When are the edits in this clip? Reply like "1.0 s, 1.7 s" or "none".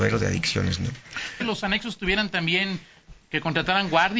1.4 s

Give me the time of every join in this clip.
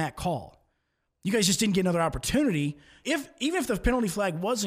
3.0 s

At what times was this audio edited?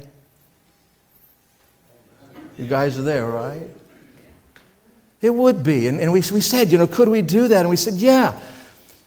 none

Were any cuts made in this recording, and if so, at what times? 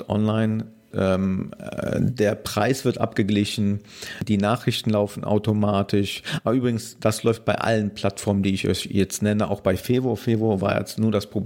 0.9 s

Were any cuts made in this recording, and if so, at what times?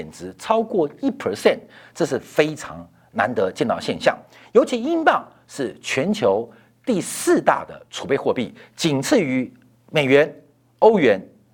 none

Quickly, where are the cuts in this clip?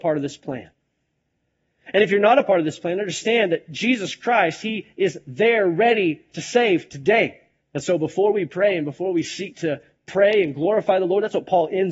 7.6 s

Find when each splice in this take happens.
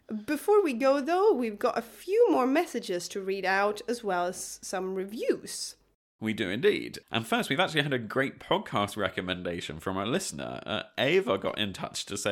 none

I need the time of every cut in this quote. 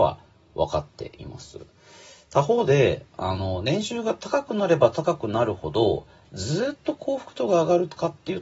none

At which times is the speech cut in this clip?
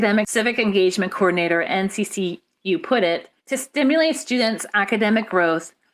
3.4 s

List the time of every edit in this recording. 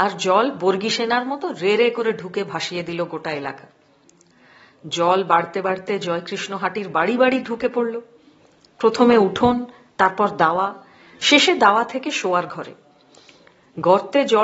none

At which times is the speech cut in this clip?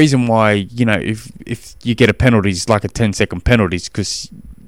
none

